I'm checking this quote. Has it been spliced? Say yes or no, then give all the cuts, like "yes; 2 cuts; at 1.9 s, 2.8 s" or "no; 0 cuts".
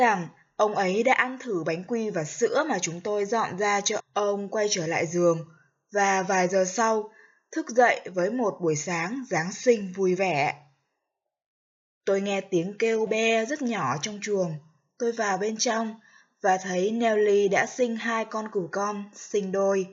yes; 3 cuts; at 4.0 s, 12.0 s, 13.1 s